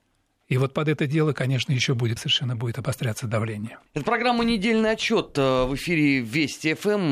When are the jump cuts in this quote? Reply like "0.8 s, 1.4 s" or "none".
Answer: 2.2 s, 3.9 s

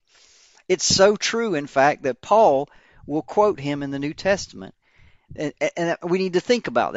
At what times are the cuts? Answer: 5.3 s

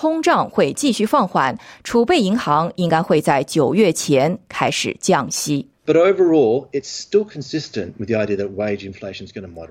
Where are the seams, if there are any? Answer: 5.8 s

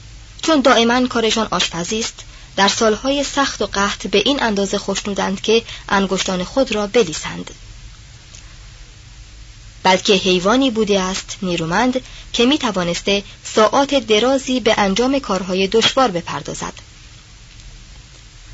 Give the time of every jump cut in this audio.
9.8 s

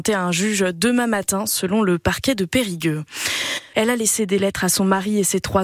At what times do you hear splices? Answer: 3.7 s

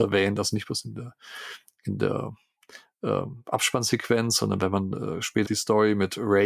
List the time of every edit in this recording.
5.4 s

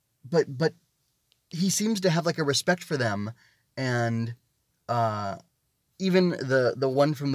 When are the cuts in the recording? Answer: none

